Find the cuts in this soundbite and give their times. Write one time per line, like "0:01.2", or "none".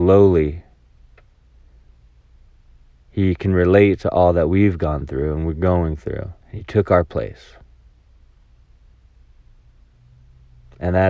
0:06.4